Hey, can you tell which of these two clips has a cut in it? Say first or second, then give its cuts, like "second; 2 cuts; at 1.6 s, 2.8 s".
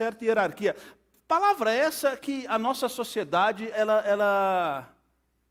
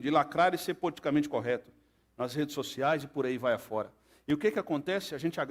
first; 1 cut; at 3.7 s